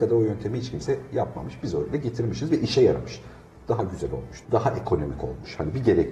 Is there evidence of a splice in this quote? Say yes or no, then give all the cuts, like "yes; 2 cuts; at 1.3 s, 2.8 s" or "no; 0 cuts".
yes; 1 cut; at 4.4 s